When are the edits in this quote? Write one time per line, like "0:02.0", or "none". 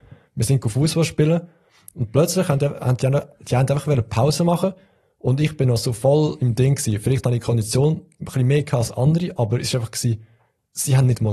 none